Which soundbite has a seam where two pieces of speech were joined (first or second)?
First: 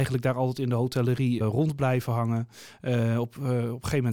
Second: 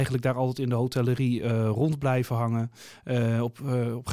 first